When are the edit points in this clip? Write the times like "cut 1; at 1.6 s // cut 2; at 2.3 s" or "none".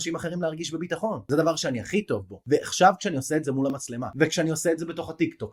none